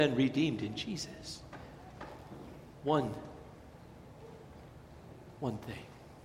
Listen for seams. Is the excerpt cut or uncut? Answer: cut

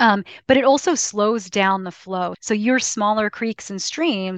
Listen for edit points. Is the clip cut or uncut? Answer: cut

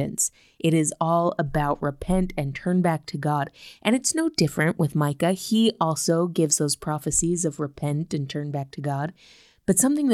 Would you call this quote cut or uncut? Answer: uncut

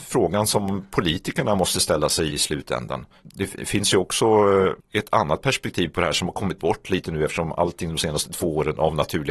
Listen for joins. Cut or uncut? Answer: uncut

